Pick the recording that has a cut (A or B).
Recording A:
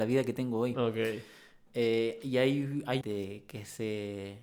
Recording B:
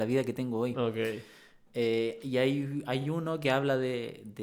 A